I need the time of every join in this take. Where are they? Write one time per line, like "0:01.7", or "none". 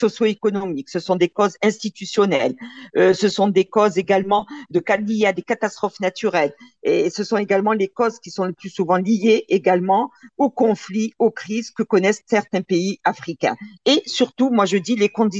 none